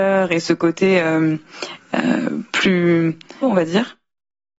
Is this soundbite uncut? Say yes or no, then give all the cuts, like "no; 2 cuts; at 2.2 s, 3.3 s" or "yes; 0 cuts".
no; 1 cut; at 3.4 s